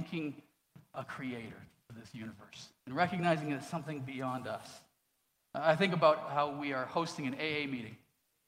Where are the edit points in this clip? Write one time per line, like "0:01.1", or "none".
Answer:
0:02.8